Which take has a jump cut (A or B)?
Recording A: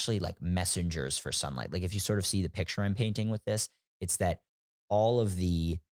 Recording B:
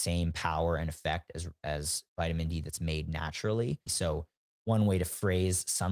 B